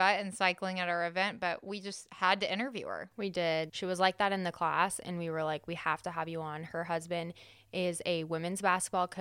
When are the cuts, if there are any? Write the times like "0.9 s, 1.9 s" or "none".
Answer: 3.7 s

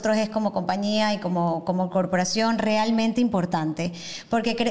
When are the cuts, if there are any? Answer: none

